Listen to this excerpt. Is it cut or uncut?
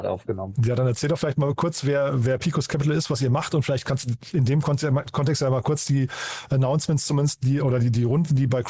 uncut